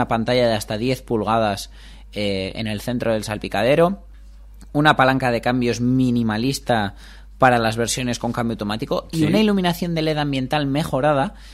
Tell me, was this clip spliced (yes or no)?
no